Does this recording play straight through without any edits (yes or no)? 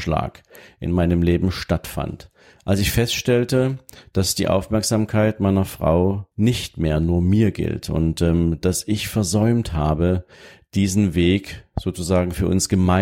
no